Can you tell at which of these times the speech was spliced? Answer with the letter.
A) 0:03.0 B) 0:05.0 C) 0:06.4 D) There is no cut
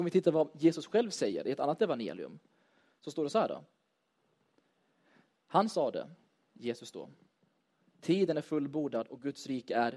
A